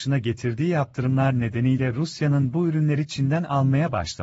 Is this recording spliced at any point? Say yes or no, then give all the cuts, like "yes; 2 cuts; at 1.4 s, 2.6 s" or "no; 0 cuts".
no; 0 cuts